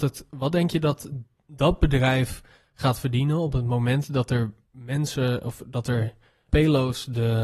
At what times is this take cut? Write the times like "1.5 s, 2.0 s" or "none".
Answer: 6.5 s